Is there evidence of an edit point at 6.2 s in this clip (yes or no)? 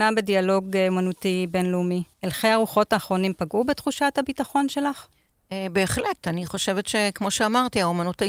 no